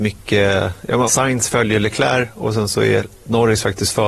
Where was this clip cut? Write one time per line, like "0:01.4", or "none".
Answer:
0:01.1